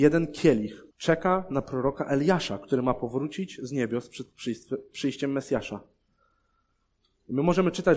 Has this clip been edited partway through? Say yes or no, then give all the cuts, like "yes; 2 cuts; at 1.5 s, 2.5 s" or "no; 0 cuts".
yes; 1 cut; at 0.9 s